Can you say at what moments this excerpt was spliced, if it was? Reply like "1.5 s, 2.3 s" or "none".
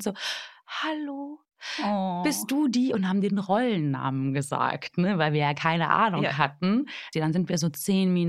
7.1 s